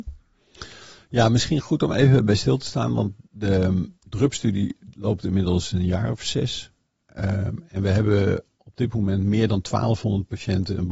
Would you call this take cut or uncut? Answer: uncut